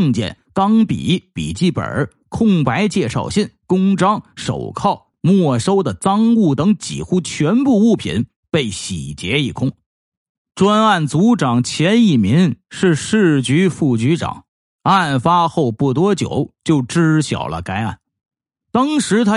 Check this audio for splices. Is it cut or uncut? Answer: cut